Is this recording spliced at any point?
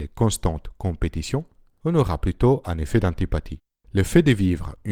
yes; 1 cut; at 3.8 s

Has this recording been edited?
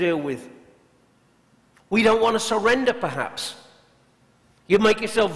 no; 0 cuts

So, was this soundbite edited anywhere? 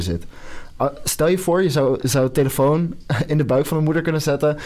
no; 0 cuts

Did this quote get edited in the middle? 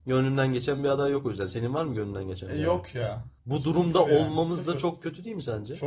yes; 1 cut; at 3.4 s

